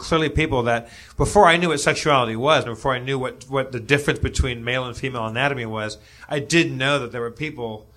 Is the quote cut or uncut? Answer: cut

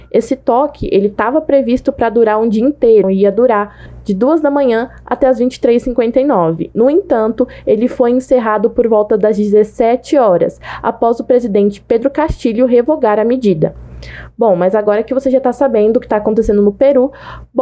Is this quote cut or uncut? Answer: cut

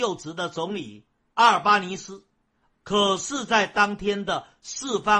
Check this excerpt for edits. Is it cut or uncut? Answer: cut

